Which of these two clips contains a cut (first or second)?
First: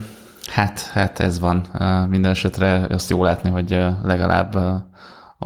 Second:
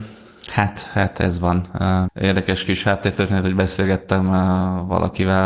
second